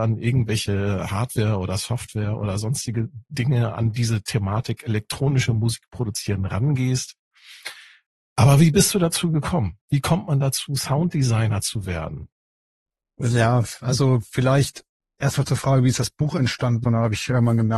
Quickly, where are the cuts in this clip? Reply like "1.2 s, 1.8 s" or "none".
16.8 s